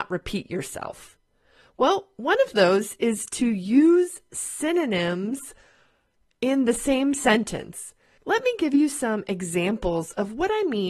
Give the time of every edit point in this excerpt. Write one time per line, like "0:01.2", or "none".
0:08.2